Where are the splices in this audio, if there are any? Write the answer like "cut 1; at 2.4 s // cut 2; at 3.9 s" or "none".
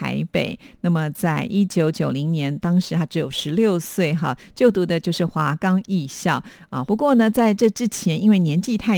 cut 1; at 6.8 s